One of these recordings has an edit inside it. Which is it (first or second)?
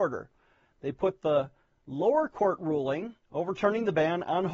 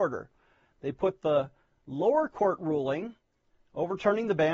first